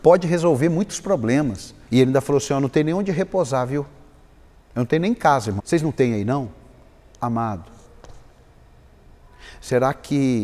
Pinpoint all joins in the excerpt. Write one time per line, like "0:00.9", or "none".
0:01.9
0:05.6